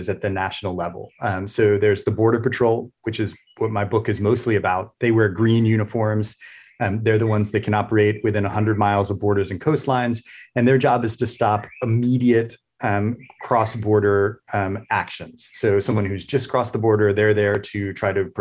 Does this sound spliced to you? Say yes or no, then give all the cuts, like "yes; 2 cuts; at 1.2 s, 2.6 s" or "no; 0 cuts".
no; 0 cuts